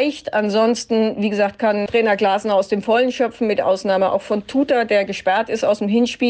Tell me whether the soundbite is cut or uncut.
uncut